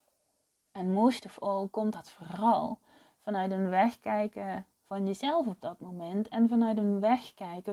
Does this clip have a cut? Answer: no; 0 cuts

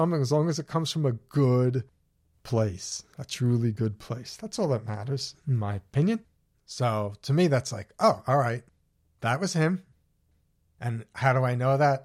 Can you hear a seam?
yes; 2 cuts; at 6.5 s, 10.7 s

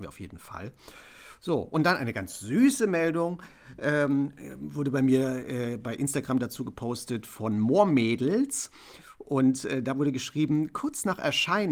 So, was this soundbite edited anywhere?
no; 0 cuts

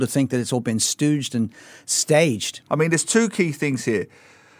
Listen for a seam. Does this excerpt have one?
yes; 1 cut; at 2.7 s

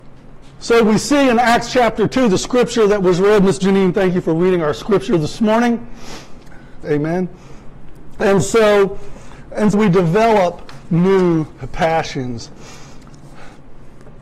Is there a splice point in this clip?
yes; 2 cuts; at 6.8 s, 9.7 s

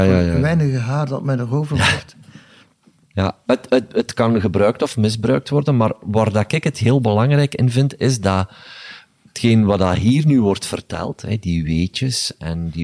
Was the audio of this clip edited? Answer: no; 0 cuts

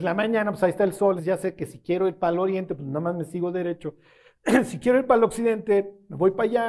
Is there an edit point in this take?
yes; 1 cut; at 1.2 s

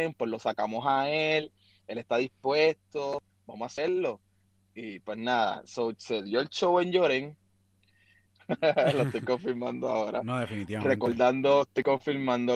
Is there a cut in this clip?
yes; 1 cut; at 8.3 s

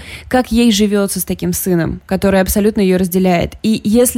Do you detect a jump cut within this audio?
no; 0 cuts

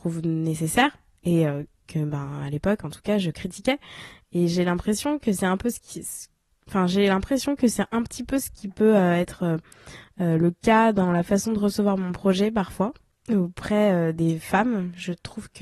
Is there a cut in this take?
no; 0 cuts

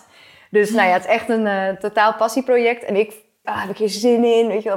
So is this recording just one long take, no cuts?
no; 1 cut; at 3.4 s

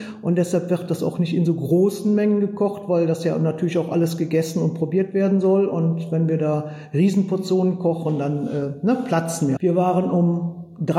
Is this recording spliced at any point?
yes; 1 cut; at 9.6 s

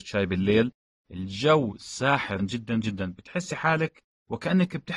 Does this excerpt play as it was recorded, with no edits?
no; 1 cut; at 2.4 s

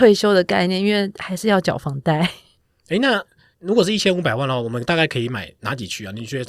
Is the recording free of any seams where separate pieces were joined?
yes; 0 cuts

